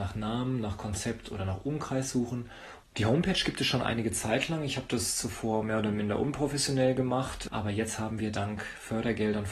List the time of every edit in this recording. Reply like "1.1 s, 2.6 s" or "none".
2.8 s